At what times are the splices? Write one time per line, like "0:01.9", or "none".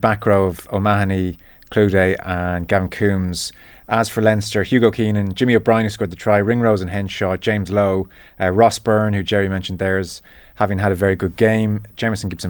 none